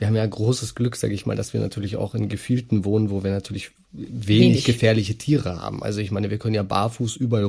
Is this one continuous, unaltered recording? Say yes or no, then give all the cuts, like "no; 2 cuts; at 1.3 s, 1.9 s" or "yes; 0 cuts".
yes; 0 cuts